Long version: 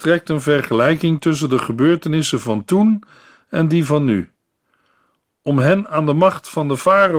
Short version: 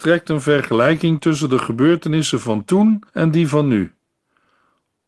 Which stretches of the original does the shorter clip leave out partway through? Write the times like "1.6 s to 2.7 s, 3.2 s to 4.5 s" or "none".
3.1 s to 3.4 s